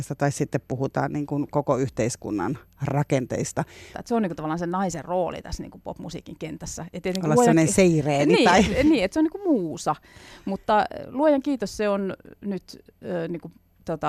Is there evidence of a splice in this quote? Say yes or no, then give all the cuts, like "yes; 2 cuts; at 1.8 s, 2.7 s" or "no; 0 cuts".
yes; 1 cut; at 3.9 s